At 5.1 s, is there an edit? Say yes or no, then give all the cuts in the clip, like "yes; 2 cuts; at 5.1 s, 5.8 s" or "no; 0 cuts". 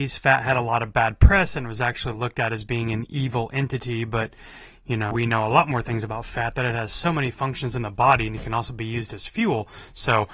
yes; 1 cut; at 5.1 s